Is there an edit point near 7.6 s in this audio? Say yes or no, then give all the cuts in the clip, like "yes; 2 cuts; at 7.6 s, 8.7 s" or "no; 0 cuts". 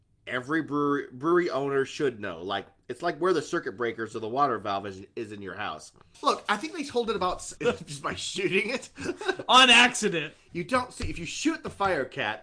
yes; 2 cuts; at 6.1 s, 7.6 s